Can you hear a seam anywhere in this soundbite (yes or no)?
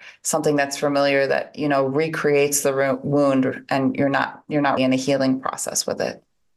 yes